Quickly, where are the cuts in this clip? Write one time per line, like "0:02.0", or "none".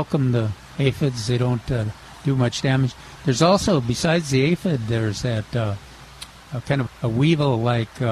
0:06.9